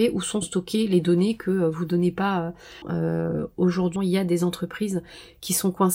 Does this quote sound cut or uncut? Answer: cut